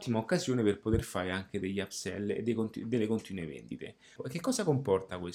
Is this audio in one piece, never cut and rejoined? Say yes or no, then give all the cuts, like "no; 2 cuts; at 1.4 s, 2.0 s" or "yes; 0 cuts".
no; 1 cut; at 4.2 s